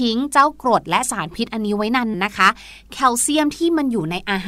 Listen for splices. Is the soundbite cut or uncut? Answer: cut